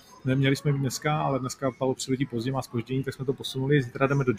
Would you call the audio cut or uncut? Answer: uncut